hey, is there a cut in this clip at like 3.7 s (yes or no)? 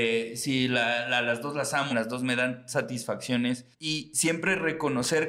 yes